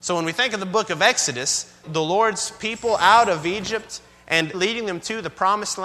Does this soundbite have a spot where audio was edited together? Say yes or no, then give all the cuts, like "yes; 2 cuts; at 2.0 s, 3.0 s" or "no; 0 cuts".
yes; 2 cuts; at 1.8 s, 4.5 s